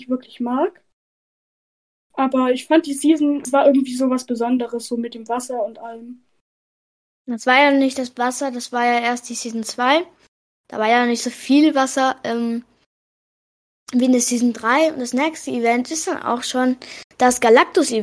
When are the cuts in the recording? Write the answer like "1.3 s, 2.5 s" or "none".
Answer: none